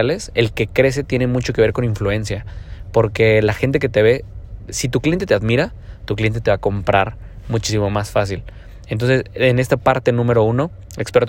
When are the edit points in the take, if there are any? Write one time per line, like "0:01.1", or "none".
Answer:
none